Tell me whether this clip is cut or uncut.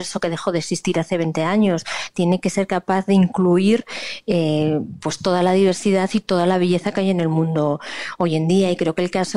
uncut